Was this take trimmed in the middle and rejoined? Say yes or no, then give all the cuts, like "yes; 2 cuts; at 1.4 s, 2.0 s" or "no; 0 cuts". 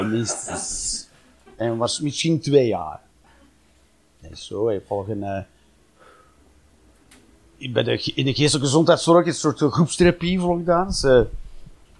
no; 0 cuts